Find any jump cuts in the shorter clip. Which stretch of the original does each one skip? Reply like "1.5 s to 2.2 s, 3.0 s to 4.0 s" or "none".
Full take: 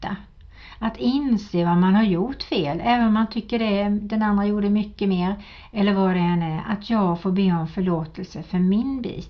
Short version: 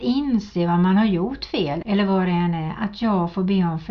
2.8 s to 5.7 s